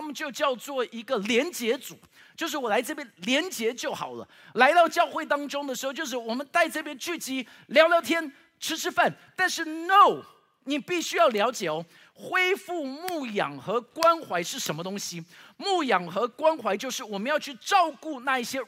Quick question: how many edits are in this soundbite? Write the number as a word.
zero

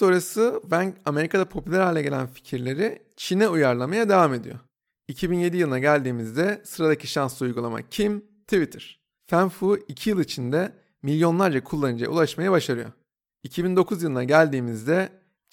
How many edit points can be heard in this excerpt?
two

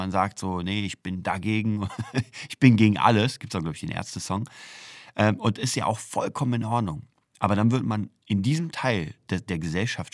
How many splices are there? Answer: zero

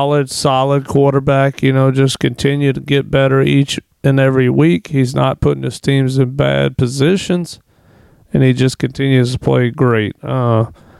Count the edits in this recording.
zero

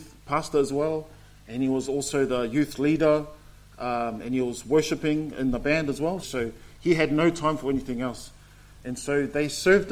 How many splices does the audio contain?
two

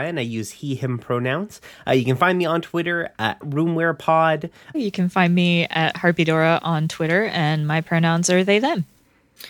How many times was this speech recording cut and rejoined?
two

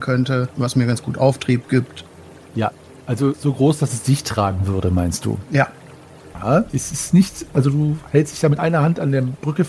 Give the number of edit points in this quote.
two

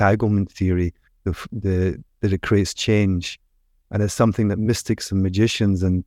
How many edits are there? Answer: one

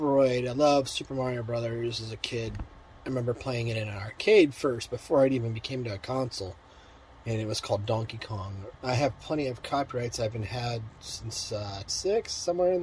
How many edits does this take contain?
two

